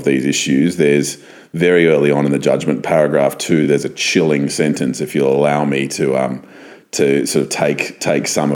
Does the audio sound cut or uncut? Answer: uncut